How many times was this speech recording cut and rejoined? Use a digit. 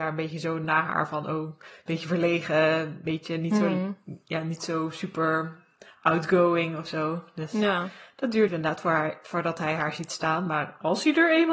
1